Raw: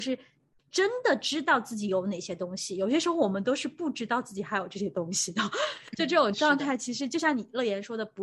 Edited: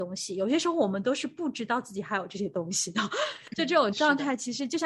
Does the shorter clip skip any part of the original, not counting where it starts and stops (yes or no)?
no